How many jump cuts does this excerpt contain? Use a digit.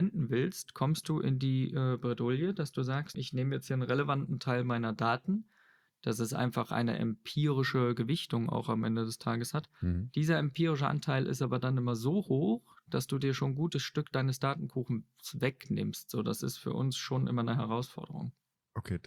1